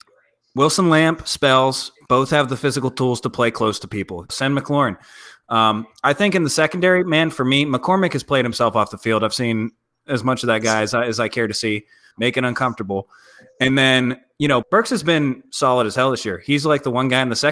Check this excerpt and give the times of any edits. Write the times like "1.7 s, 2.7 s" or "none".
4.3 s, 12.1 s, 14.6 s